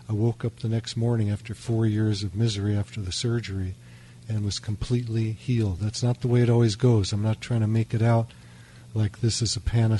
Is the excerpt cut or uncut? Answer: uncut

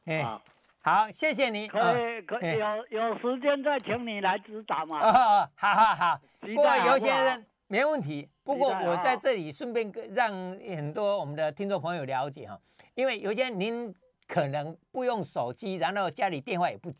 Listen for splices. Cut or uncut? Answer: uncut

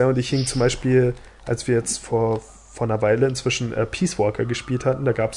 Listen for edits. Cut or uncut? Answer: uncut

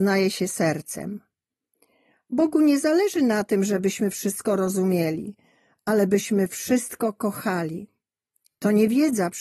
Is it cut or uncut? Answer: uncut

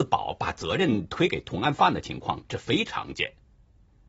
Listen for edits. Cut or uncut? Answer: cut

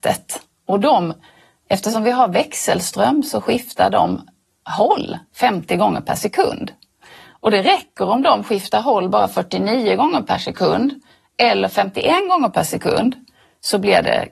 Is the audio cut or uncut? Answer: uncut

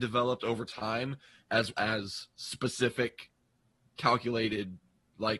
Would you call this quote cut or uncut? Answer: cut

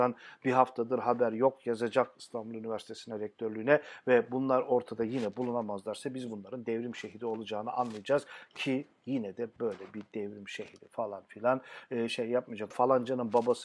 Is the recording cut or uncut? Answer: cut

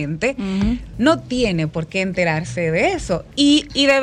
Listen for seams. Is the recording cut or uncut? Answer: uncut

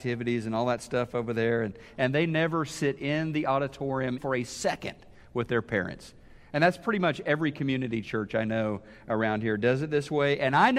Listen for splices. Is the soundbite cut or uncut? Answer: cut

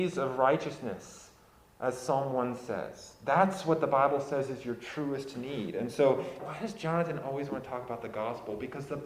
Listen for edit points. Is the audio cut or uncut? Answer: cut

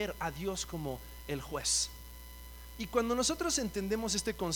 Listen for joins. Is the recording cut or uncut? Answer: cut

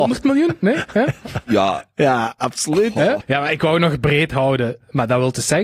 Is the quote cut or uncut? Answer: cut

